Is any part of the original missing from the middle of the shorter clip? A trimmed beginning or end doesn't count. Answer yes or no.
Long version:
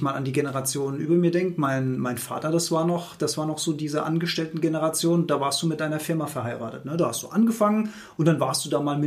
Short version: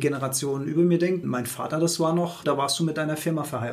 yes